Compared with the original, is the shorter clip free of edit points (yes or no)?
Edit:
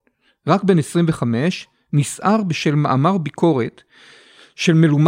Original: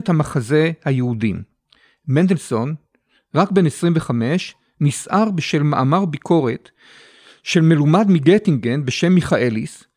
yes